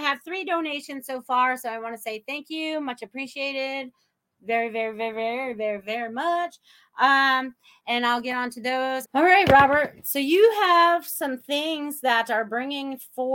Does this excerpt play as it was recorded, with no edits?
no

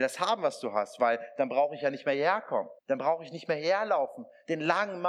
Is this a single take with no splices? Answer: no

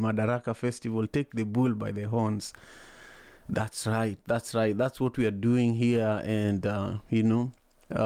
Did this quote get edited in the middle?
no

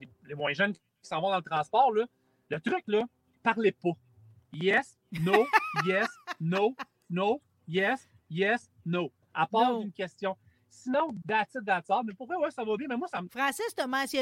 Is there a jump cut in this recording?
yes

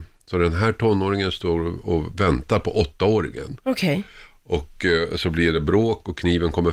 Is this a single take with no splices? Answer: yes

